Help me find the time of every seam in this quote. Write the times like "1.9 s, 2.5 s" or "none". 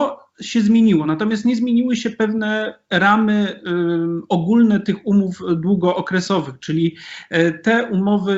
none